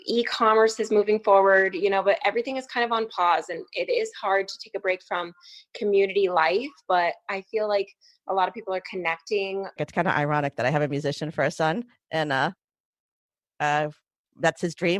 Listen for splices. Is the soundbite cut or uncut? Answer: cut